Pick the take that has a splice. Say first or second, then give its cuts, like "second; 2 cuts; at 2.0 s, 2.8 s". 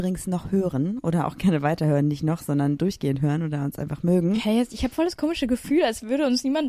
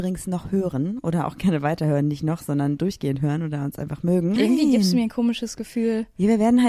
second; 1 cut; at 4.4 s